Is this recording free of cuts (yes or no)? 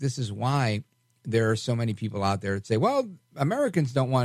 yes